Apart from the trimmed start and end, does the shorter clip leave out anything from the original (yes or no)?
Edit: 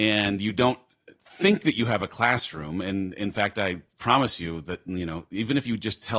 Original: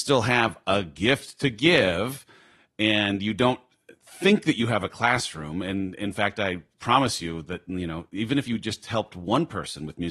no